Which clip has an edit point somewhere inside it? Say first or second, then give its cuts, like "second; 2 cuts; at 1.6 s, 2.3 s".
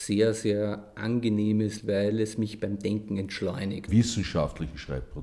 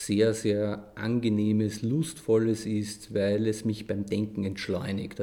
first; 2 cuts; at 1.8 s, 3.9 s